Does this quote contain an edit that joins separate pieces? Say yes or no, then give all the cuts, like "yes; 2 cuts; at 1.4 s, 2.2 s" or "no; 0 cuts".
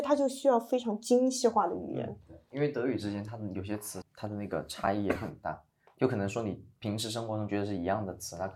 yes; 1 cut; at 4.0 s